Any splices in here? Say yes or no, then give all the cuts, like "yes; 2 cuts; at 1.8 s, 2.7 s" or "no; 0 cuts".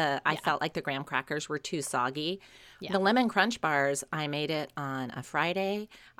no; 0 cuts